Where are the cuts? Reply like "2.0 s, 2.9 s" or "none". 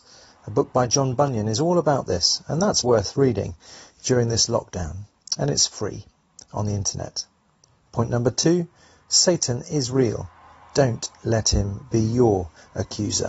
2.8 s